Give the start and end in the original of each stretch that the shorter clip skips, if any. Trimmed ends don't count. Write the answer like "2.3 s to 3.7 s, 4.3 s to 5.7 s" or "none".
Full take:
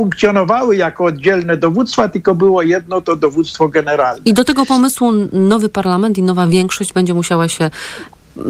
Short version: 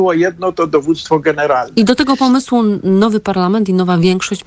none

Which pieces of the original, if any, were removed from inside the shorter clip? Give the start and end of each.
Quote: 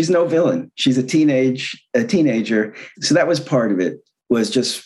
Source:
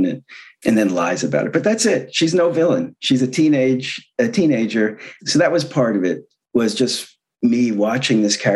none

